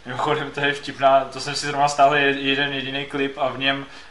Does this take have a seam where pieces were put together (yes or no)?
no